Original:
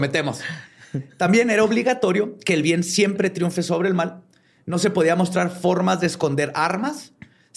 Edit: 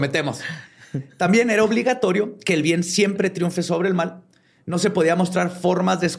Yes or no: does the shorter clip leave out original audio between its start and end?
no